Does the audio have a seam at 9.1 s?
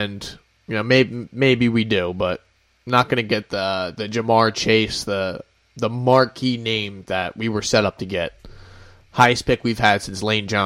no; 0 cuts

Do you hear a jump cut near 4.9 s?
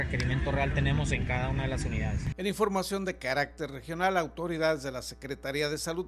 no; 1 cut; at 2.3 s

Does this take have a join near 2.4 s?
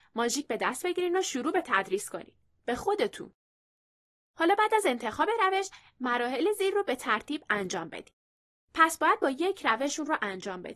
no; 1 cut; at 8.6 s

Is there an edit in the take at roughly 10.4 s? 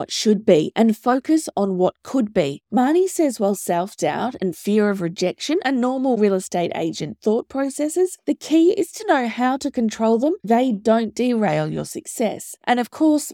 yes; 2 cuts; at 2.6 s, 10.4 s

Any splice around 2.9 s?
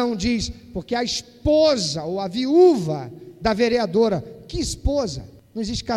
no; 0 cuts

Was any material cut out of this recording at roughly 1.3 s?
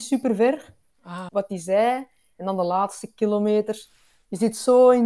yes; 1 cut; at 1.3 s

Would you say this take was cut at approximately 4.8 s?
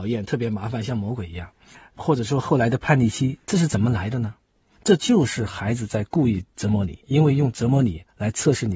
no; 1 cut; at 7.0 s

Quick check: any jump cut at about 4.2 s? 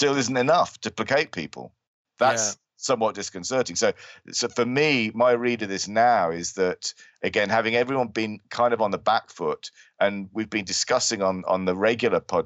no; 0 cuts

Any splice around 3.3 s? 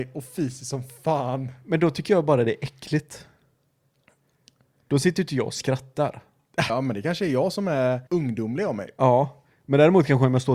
no; 2 cuts; at 6.7 s, 8.1 s

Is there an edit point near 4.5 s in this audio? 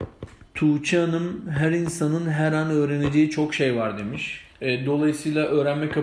yes; 1 cut; at 4.5 s

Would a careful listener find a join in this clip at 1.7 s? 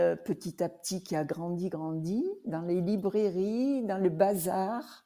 yes; 1 cut; at 1.7 s

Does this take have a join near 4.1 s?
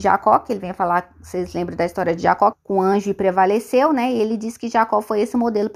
no; 1 cut; at 2.5 s

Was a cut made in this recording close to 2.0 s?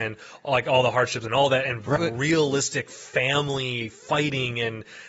yes; 1 cut; at 2.0 s

